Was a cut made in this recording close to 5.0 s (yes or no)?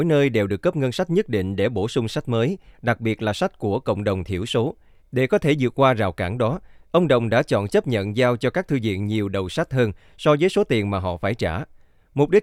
yes